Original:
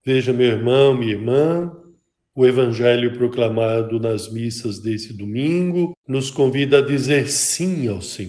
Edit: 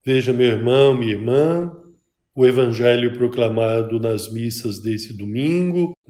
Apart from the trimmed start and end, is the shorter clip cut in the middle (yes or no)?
no